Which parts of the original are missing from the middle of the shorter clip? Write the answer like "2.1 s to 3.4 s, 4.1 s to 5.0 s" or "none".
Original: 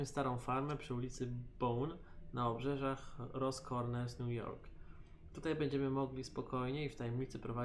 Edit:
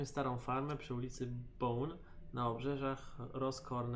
none